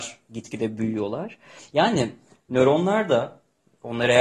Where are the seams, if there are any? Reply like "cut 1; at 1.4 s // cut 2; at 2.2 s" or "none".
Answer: cut 1; at 1.6 s